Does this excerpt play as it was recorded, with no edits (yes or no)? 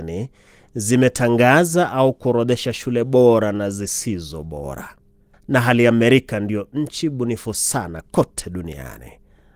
no